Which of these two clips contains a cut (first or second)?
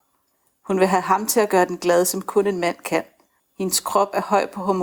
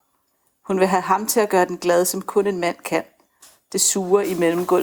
first